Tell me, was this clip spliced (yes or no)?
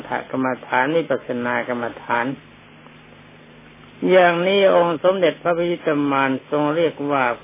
no